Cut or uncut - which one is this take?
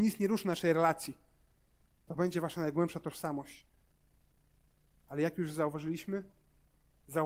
uncut